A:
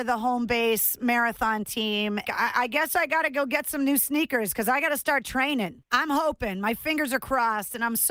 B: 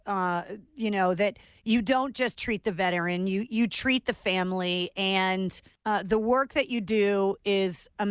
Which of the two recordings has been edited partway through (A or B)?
A